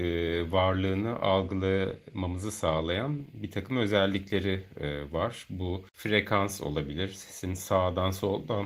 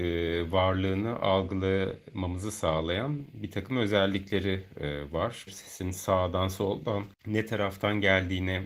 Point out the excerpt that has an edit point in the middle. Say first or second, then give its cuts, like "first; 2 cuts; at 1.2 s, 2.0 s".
second; 1 cut; at 5.5 s